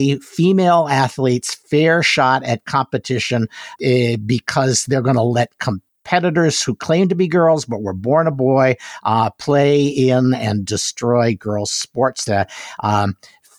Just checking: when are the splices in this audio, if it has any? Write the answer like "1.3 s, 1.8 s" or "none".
3.8 s, 12.3 s